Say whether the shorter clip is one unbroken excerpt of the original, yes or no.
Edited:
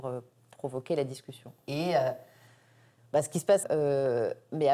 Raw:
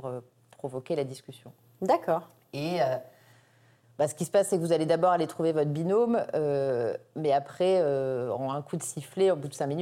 no